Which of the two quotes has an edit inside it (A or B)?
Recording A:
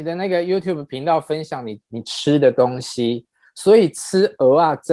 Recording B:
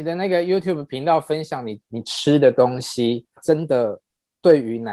B